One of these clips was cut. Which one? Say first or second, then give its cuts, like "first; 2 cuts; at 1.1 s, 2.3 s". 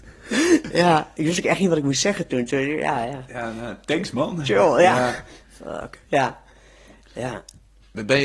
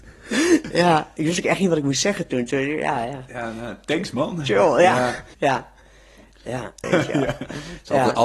second; 2 cuts; at 5.3 s, 6.8 s